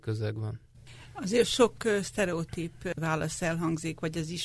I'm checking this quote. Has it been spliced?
no; 0 cuts

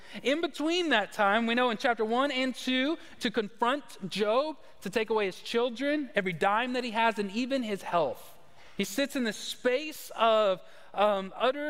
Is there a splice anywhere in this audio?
yes; 1 cut; at 3.2 s

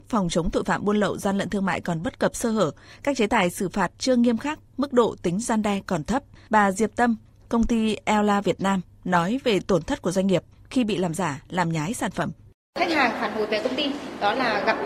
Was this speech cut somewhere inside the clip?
yes; 1 cut; at 6.5 s

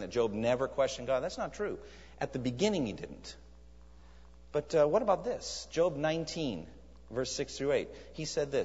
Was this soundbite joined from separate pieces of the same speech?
no; 0 cuts

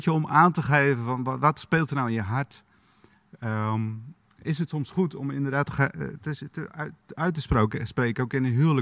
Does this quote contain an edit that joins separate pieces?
no; 0 cuts

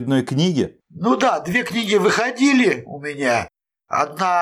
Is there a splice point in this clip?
no; 0 cuts

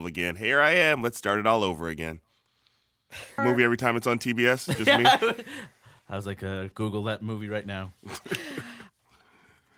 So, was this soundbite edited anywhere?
yes; 2 cuts; at 3.4 s, 6.7 s

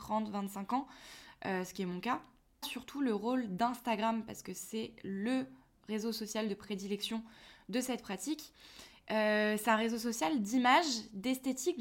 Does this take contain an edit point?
yes; 1 cut; at 2.6 s

